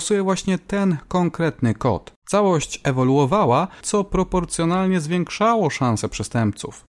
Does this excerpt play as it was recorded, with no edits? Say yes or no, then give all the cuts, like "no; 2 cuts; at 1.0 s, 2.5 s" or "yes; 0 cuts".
no; 2 cuts; at 2.2 s, 3.8 s